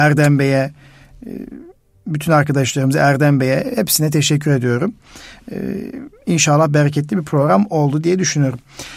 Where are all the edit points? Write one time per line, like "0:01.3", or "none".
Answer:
none